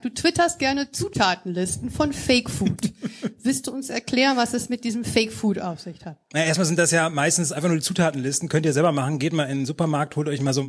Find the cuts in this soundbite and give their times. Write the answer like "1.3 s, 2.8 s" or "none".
none